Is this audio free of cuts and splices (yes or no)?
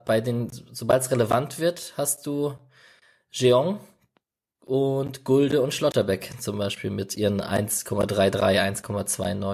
yes